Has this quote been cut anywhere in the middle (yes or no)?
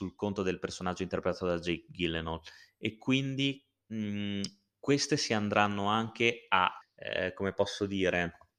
yes